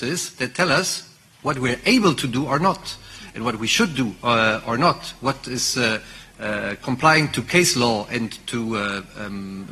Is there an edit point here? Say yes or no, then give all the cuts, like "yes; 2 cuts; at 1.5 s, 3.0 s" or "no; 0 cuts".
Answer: no; 0 cuts